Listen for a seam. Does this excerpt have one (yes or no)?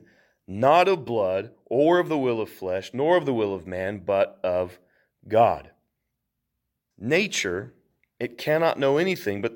yes